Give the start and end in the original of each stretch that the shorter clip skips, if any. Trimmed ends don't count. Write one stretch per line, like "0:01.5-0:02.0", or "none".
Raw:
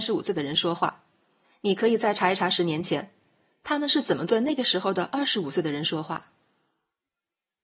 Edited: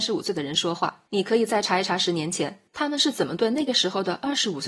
0:01.1-0:01.6
0:03.2-0:03.6